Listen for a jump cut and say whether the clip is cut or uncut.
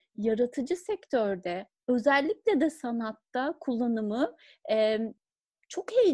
uncut